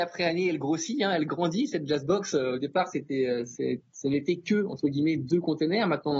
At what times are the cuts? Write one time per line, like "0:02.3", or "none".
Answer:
none

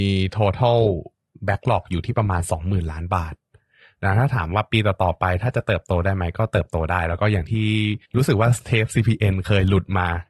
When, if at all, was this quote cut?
0:08.1

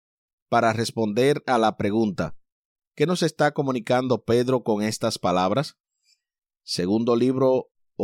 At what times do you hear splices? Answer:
none

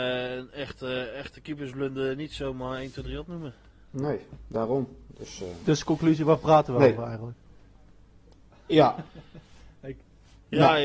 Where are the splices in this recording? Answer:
none

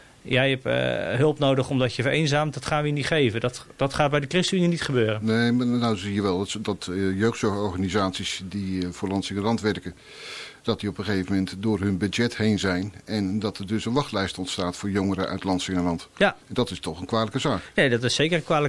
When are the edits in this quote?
0:16.4

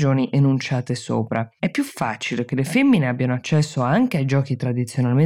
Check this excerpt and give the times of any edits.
0:02.5

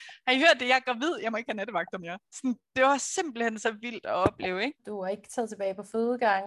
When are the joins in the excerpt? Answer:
0:04.8

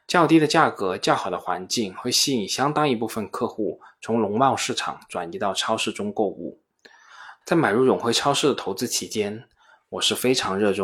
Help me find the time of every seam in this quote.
0:07.4

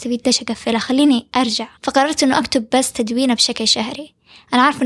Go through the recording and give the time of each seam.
0:01.8

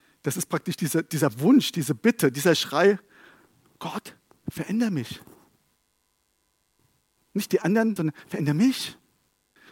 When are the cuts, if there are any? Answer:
0:08.0

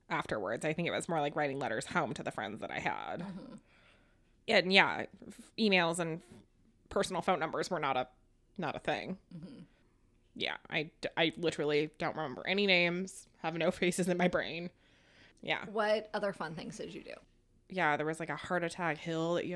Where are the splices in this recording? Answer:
0:17.6

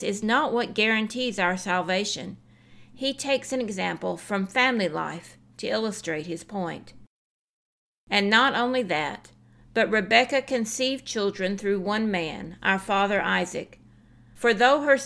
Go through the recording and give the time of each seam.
none

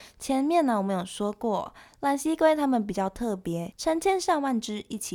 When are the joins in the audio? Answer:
0:03.7

